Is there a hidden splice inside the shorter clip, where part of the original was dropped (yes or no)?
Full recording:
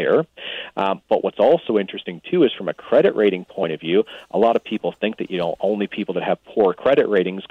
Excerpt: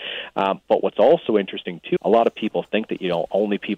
yes